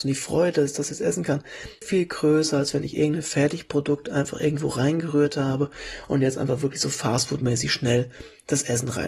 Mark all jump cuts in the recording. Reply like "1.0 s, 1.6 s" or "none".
1.8 s